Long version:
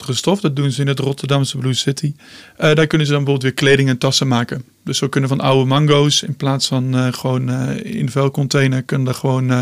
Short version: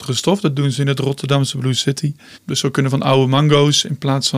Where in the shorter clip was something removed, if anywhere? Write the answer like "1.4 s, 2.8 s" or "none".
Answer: 2.3 s

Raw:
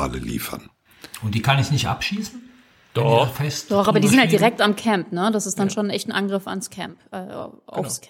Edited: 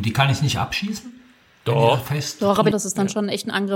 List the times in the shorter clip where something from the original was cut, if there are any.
2.7 s

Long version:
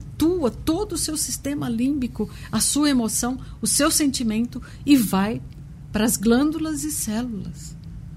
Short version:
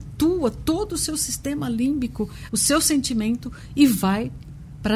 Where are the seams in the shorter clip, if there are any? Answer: 2.5 s

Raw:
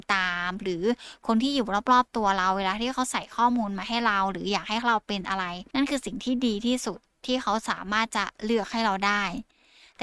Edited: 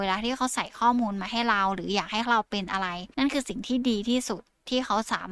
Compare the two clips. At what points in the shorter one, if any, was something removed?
none

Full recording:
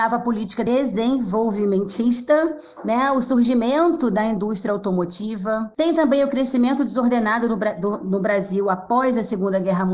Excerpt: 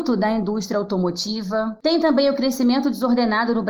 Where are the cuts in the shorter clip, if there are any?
none

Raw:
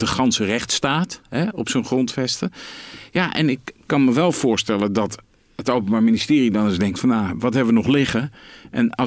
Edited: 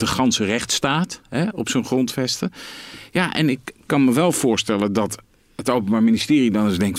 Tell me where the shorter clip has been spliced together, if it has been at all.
none

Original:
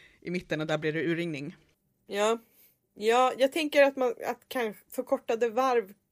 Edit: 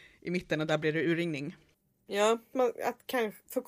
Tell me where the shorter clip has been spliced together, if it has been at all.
2.5 s

